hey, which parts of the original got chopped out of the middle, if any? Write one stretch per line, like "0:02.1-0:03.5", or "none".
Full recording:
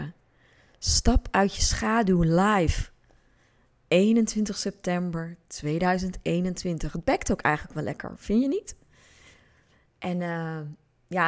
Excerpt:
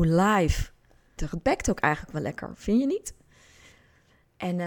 0:03.4-0:06.8